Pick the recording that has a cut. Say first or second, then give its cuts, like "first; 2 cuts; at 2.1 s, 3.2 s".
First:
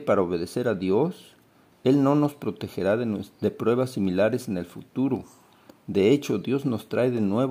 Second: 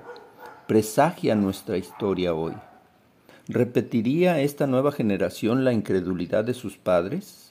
second; 1 cut; at 3.3 s